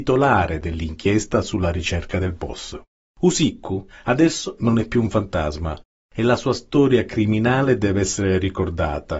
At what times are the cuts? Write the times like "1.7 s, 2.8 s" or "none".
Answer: 3.1 s